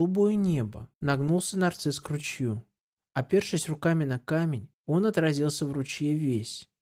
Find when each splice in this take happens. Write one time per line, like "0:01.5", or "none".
0:00.9
0:04.7

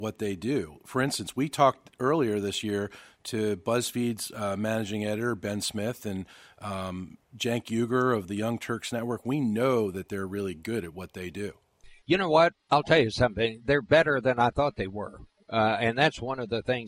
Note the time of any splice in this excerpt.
0:12.6

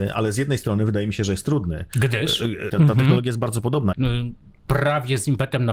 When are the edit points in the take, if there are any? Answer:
0:02.7
0:03.9

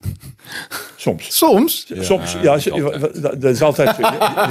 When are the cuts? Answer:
none

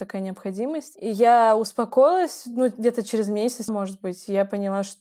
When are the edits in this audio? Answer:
0:03.7

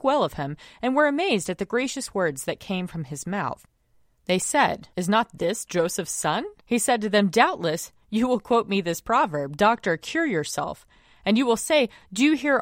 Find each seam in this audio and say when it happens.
0:04.9
0:06.6

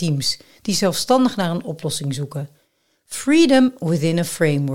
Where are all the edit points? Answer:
none

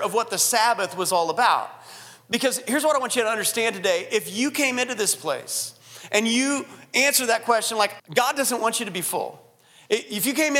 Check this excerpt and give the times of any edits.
0:08.0

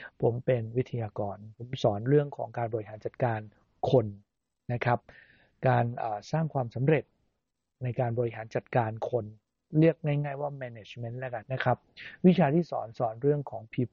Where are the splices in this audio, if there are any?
0:11.4

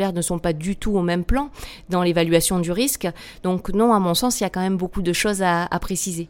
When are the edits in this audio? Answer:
none

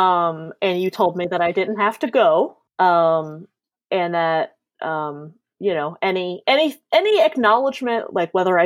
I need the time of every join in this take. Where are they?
0:02.7

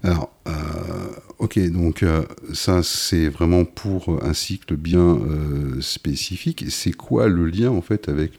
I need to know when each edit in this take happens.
none

